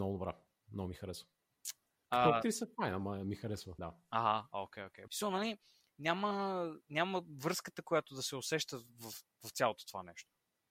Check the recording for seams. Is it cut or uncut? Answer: cut